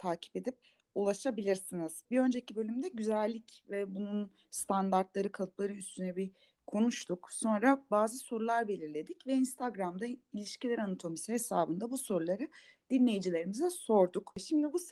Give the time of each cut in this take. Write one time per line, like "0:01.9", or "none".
0:02.0